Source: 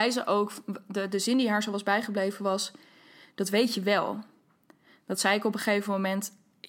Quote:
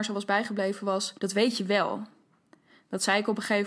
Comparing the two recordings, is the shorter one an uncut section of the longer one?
no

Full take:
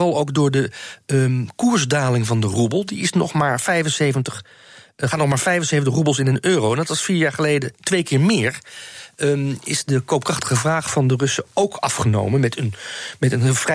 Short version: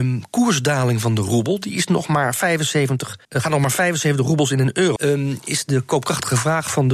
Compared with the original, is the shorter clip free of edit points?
no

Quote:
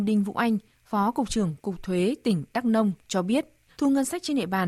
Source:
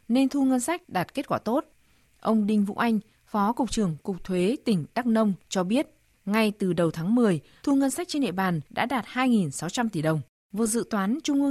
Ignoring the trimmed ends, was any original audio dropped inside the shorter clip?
yes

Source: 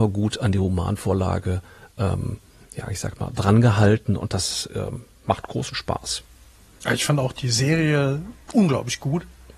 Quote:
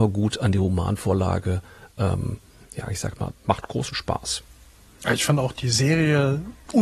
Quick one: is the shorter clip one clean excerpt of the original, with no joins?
no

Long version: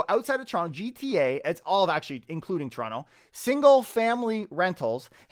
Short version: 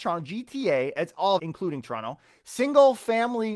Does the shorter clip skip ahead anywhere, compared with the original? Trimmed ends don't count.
yes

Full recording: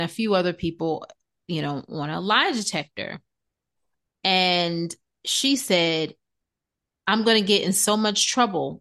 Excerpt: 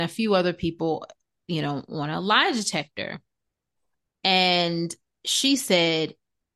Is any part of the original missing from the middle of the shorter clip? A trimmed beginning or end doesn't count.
no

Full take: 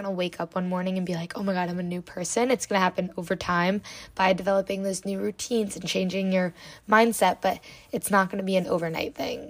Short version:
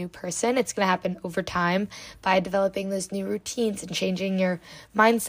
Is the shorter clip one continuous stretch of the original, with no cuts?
yes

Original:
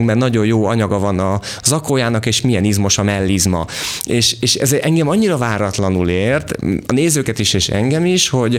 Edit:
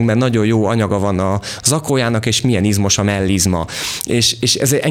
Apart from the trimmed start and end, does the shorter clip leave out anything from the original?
no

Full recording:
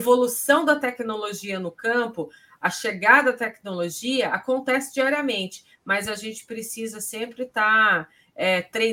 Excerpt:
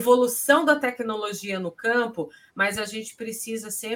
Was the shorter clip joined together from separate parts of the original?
yes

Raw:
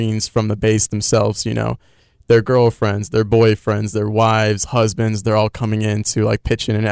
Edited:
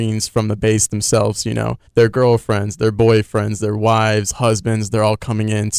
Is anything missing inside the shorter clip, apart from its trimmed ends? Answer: yes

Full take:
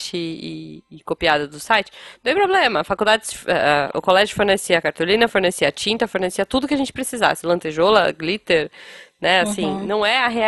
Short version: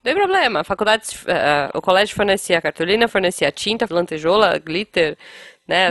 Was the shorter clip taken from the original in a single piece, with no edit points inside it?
no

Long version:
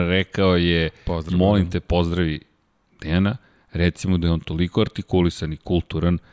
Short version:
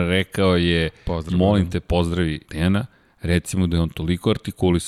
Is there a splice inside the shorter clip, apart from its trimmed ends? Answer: yes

